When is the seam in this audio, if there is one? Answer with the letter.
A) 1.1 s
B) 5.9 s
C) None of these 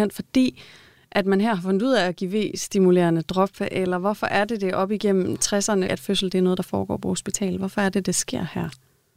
B